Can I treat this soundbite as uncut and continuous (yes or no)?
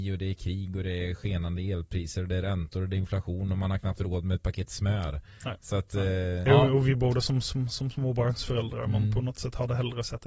no